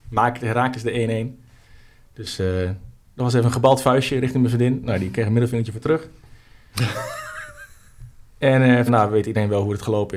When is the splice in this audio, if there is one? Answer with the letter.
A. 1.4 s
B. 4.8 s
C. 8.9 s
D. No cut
C